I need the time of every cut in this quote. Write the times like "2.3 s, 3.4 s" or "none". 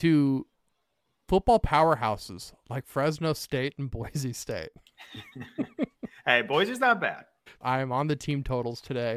7.6 s